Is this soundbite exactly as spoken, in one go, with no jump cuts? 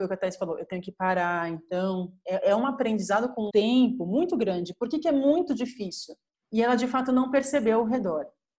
no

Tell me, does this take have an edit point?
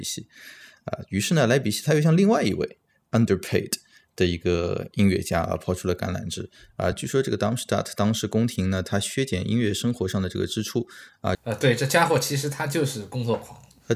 yes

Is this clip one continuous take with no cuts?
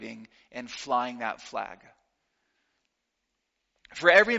yes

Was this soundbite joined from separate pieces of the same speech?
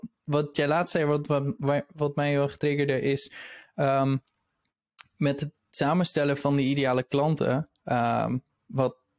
no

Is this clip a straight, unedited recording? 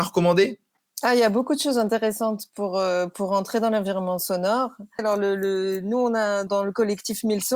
no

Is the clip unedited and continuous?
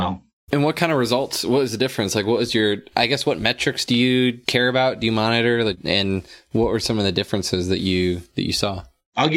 yes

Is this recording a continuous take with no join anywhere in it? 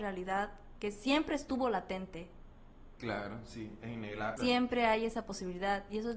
no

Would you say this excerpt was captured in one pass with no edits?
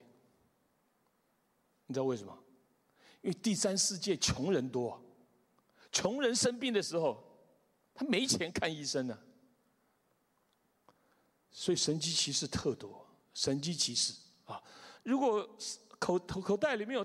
no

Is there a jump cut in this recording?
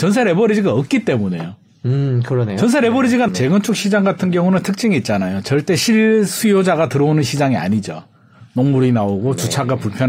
yes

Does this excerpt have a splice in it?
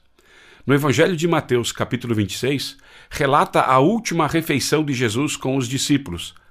no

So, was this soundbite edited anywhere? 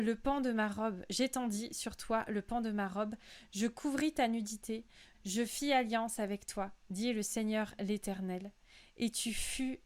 yes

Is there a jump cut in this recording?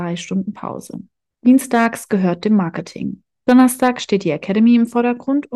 yes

